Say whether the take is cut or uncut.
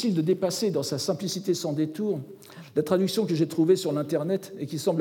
uncut